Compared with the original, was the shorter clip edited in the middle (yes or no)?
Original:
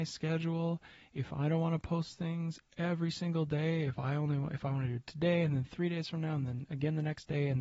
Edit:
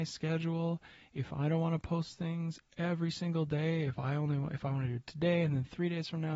no